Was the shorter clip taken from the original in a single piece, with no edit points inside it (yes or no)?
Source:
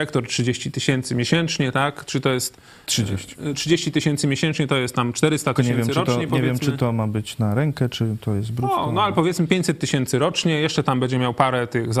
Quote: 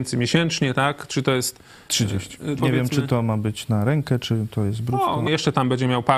no